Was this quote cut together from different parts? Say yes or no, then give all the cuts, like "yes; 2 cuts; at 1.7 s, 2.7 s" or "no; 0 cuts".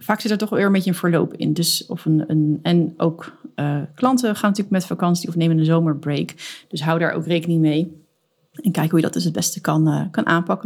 no; 0 cuts